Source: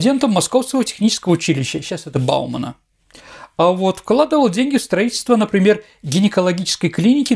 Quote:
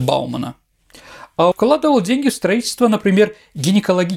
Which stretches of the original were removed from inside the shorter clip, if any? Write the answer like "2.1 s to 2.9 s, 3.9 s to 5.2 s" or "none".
3.7 s to 4.0 s